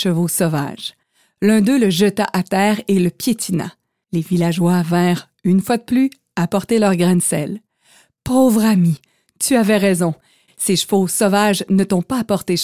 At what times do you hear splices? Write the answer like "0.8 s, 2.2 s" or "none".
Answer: none